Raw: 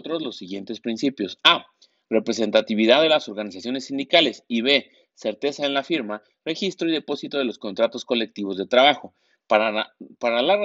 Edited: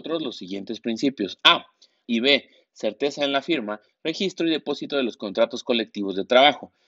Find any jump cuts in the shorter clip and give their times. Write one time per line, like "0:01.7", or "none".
0:02.0